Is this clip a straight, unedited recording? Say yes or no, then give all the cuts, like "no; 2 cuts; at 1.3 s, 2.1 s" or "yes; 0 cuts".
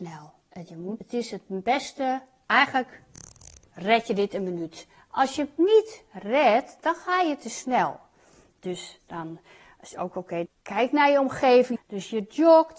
no; 3 cuts; at 1.0 s, 10.5 s, 11.8 s